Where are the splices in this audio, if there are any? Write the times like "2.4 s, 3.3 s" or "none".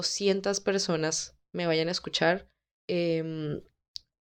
2.8 s